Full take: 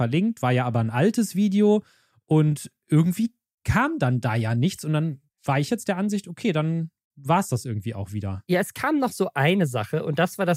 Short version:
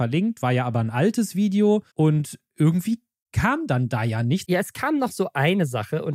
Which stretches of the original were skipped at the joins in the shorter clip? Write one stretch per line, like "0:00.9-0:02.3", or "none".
0:01.9-0:02.2
0:04.8-0:08.4